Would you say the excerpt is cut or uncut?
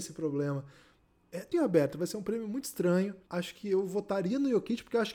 cut